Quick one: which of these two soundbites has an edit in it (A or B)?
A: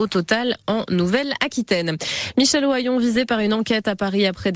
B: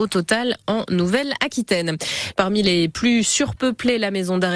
B